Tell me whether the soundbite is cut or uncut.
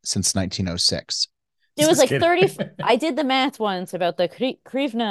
cut